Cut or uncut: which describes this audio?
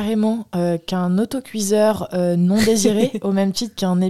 uncut